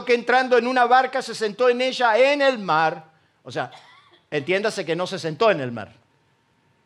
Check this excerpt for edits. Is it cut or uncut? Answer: uncut